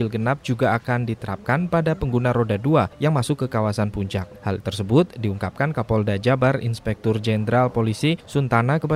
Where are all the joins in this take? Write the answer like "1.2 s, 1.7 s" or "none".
none